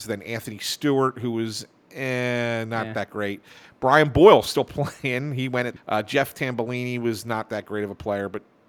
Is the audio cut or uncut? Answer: cut